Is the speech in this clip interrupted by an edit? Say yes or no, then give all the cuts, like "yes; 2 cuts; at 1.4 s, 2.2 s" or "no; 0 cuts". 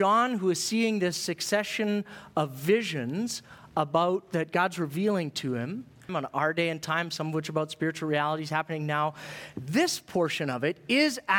yes; 1 cut; at 6.1 s